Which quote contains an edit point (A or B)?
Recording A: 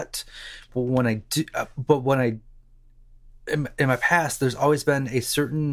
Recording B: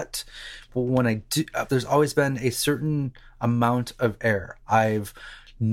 B